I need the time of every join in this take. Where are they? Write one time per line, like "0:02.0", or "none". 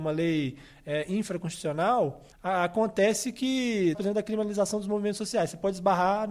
0:02.3
0:03.9